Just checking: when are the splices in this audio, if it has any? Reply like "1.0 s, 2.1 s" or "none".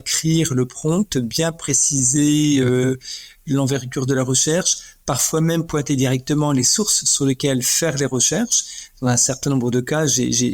none